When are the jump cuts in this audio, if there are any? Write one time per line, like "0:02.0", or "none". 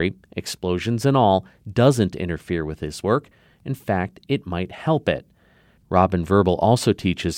none